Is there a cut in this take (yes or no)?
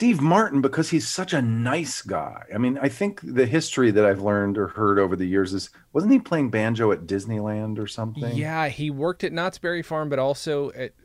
no